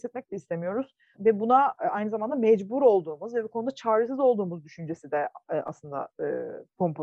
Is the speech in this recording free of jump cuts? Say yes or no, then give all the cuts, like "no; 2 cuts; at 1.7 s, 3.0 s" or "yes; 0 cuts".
no; 1 cut; at 1.1 s